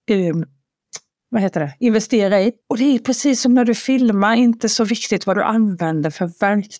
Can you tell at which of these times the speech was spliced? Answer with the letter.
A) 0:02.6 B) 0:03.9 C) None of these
A